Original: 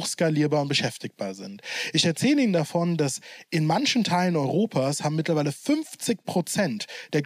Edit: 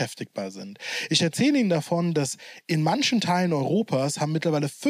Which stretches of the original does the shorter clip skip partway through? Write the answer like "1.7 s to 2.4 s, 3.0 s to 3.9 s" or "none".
none